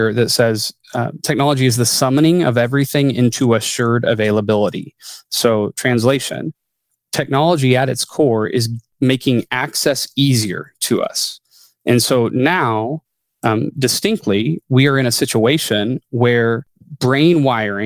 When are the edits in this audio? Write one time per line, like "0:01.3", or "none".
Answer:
none